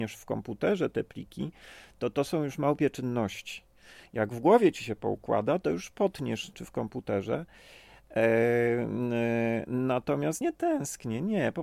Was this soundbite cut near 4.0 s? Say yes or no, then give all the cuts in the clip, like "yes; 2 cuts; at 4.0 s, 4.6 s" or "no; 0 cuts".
no; 2 cuts; at 6.5 s, 10.4 s